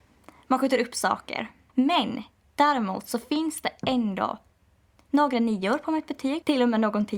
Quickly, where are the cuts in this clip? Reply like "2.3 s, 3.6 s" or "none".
1.7 s